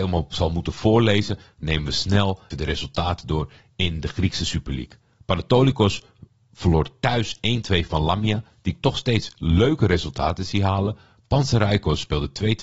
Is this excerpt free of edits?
no; 1 cut; at 2.5 s

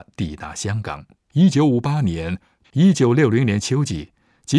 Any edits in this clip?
yes; 2 cuts; at 1.3 s, 2.6 s

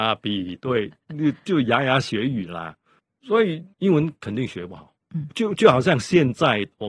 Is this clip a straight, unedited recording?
no; 1 cut; at 3.7 s

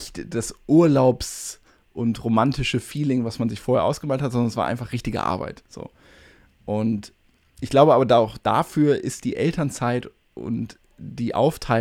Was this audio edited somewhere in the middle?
no; 0 cuts

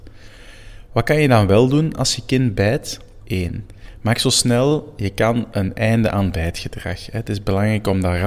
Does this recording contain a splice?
yes; 1 cut; at 3.2 s

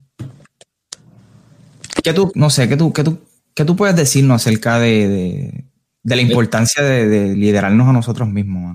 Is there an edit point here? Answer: yes; 1 cut; at 2.3 s

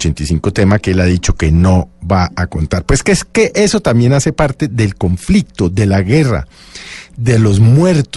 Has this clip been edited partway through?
no; 0 cuts

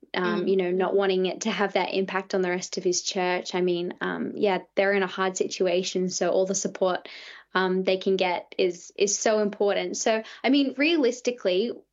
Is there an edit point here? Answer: no; 0 cuts

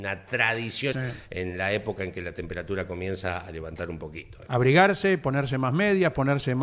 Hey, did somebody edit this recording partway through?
yes; 2 cuts; at 0.9 s, 4.5 s

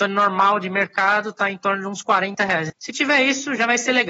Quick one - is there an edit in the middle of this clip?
yes; 1 cut; at 2.7 s

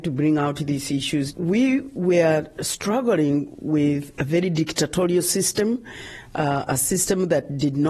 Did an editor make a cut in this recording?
yes; 1 cut; at 1.3 s

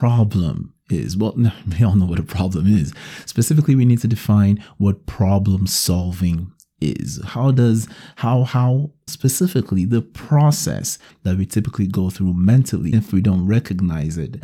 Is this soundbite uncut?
no; 2 cuts; at 9.1 s, 12.9 s

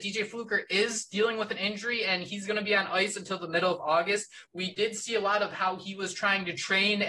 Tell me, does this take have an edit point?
no; 0 cuts

